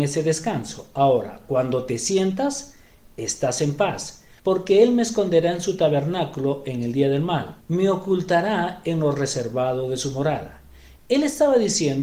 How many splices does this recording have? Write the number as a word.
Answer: two